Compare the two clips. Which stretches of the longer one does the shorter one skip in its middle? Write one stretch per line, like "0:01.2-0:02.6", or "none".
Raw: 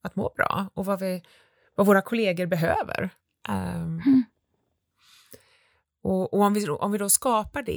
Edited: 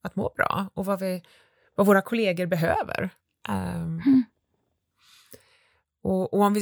none